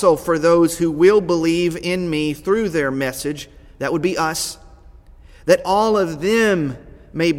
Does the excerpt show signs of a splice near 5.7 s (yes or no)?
no